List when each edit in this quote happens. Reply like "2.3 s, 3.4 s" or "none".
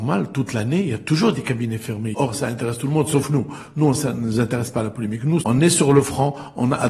2.1 s, 5.4 s